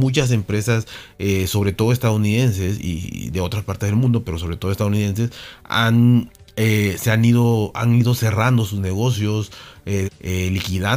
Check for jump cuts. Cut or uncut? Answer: cut